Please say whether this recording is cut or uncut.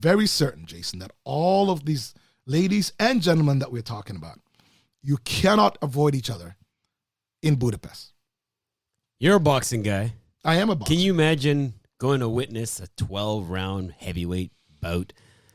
uncut